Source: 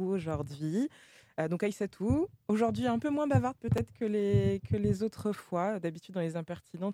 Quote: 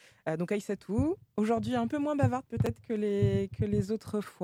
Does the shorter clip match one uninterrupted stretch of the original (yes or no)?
yes